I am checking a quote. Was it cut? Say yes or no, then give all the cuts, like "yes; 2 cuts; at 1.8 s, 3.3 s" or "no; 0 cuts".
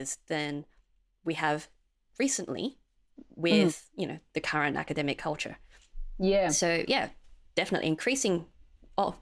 no; 0 cuts